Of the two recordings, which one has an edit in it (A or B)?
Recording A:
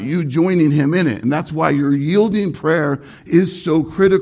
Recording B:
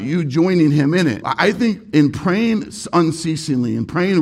B